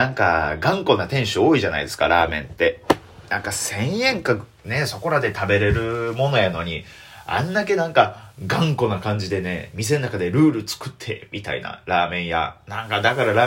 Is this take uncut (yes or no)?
yes